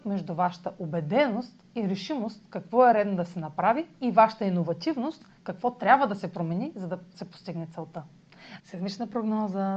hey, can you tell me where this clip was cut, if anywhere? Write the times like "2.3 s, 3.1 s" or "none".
8.6 s